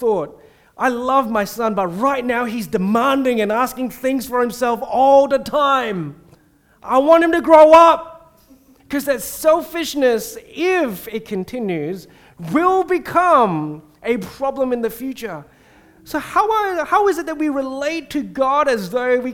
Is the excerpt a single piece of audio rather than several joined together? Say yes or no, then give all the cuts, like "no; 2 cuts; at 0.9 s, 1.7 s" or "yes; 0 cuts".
no; 1 cut; at 8.8 s